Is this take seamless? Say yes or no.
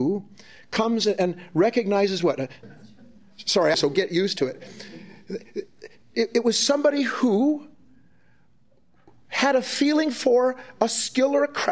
no